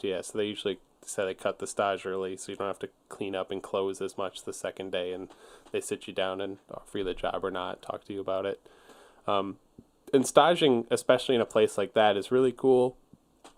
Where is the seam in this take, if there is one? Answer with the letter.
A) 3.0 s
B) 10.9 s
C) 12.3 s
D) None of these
A